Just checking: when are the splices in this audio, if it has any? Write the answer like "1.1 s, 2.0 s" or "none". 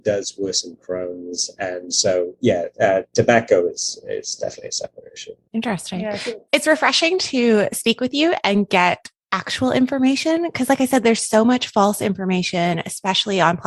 none